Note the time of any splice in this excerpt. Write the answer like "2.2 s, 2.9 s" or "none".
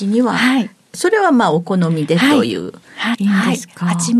3.1 s